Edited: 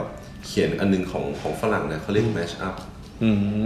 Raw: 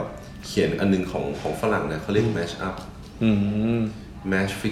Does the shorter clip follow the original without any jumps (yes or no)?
yes